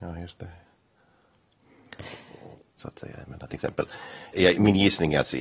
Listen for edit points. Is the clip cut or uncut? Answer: cut